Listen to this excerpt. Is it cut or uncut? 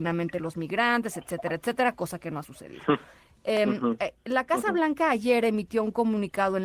uncut